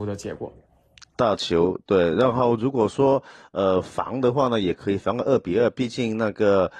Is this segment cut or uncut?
uncut